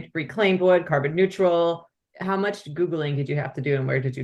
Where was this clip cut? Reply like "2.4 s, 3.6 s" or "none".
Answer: none